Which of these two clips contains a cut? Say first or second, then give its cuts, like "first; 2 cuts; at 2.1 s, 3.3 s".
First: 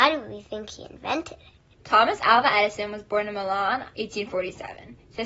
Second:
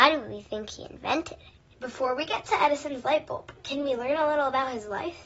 first; 2 cuts; at 1.8 s, 3.9 s